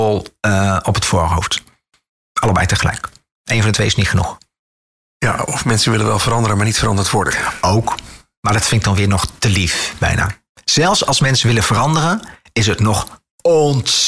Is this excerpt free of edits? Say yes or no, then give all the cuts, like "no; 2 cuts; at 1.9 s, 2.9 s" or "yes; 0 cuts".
yes; 0 cuts